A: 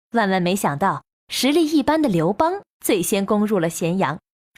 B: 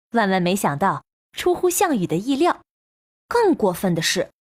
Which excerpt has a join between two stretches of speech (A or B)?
B